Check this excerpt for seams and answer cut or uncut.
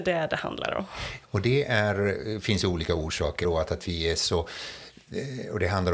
cut